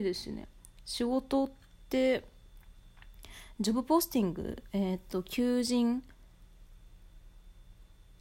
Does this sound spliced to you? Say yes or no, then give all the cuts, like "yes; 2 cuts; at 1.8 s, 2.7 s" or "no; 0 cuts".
no; 0 cuts